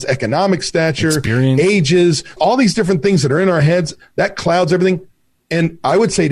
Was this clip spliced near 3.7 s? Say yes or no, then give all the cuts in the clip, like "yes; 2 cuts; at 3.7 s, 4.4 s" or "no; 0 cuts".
no; 2 cuts; at 2.4 s, 5.4 s